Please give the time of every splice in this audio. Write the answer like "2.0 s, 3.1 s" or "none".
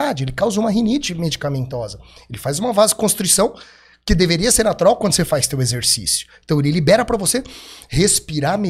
none

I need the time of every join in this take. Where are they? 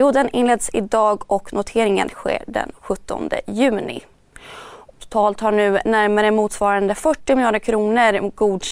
4.9 s

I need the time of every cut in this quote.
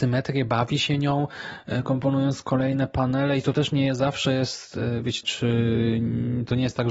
5.2 s

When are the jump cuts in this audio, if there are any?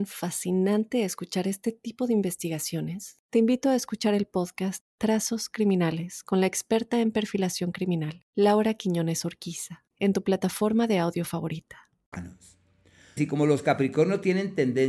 13.2 s

